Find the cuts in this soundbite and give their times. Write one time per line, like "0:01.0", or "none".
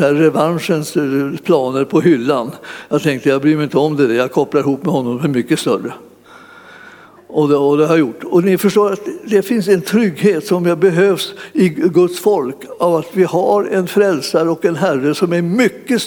none